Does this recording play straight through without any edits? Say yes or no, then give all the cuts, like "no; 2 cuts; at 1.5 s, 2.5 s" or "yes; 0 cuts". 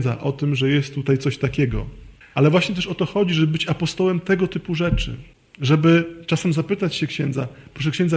no; 1 cut; at 2.3 s